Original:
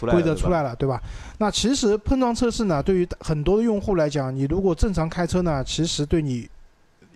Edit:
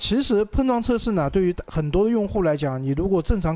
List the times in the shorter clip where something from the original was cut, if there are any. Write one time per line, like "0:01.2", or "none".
none

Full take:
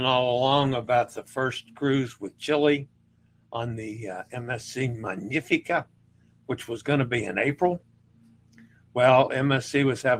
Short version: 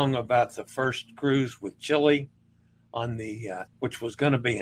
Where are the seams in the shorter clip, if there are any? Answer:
0:03.7

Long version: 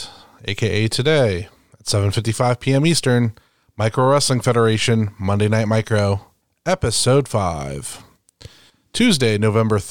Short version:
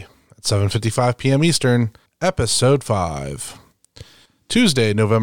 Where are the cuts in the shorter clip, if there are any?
0:02.1

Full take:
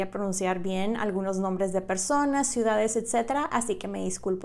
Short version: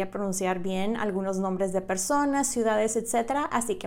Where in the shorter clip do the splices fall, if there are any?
none

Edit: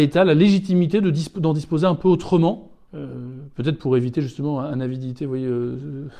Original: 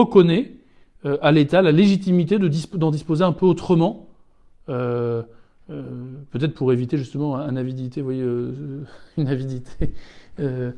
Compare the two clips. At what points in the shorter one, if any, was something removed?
0:02.9

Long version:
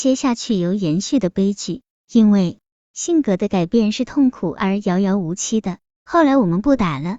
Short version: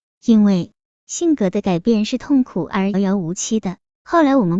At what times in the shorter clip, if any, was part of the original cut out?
0:02.9

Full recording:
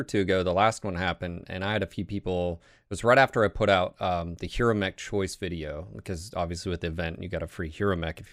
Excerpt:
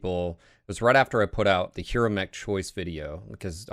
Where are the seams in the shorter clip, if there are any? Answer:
0:01.7

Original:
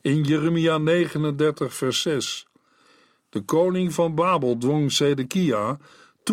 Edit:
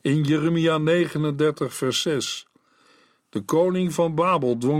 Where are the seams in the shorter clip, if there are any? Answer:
none

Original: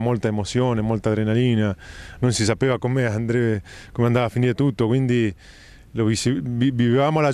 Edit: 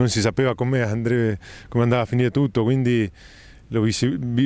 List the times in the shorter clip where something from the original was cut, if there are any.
none

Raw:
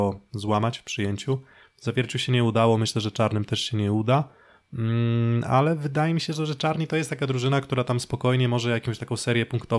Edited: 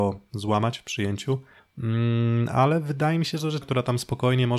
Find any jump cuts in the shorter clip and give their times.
0:01.6
0:03.6

